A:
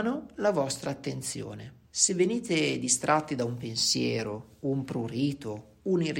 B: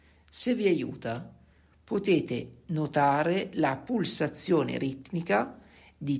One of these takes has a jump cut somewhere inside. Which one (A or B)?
A